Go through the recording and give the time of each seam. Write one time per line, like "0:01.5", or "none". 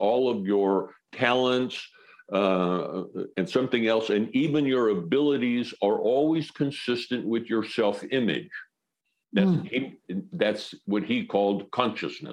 0:03.3